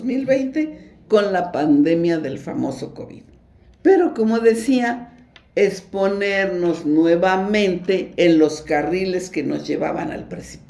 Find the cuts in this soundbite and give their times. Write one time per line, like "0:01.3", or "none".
0:03.7